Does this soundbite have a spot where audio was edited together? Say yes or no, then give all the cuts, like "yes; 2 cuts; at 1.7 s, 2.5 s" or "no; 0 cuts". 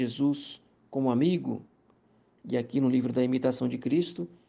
yes; 1 cut; at 2.4 s